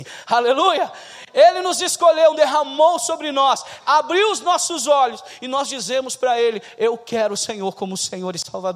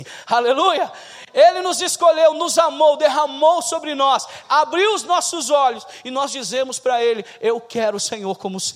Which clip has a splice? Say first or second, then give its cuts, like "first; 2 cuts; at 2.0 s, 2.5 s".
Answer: first; 1 cut; at 2.3 s